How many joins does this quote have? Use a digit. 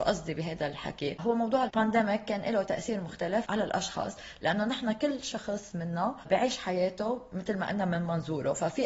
1